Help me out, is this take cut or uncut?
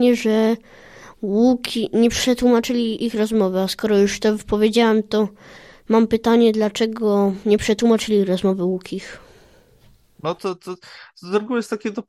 uncut